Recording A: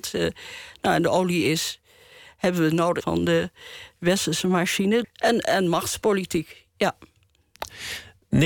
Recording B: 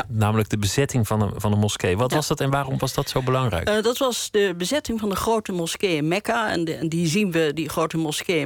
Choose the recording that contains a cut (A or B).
A